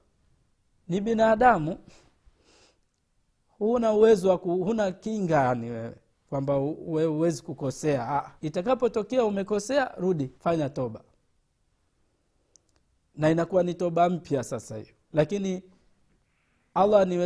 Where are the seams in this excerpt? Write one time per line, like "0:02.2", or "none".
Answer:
0:08.4
0:10.4
0:15.0